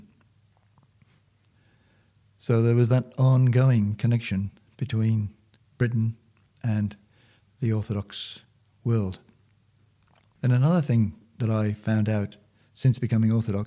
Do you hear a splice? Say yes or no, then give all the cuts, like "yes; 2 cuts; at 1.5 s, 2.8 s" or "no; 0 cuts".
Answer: no; 0 cuts